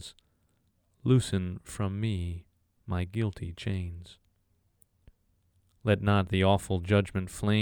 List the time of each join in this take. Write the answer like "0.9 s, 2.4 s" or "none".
none